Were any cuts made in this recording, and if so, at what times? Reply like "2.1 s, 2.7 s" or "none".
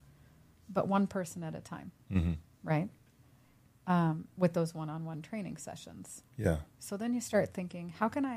none